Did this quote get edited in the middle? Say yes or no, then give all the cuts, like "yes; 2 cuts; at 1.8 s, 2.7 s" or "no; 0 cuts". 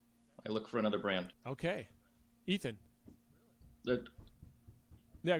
yes; 1 cut; at 1.3 s